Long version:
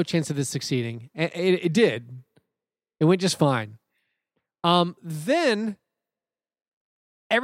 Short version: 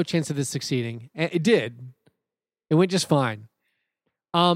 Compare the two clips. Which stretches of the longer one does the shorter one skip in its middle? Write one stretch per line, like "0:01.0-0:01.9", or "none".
0:01.3-0:01.6